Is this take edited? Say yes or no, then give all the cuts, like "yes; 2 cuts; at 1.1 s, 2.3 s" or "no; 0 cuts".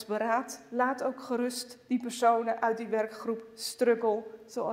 no; 0 cuts